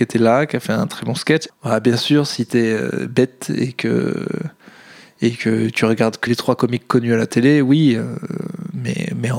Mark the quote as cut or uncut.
cut